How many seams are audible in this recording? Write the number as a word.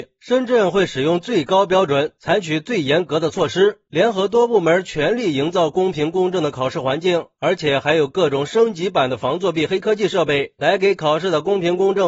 zero